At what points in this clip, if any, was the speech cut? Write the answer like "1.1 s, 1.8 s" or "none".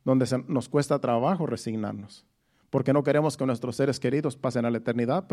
none